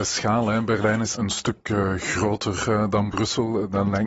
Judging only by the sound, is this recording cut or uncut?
cut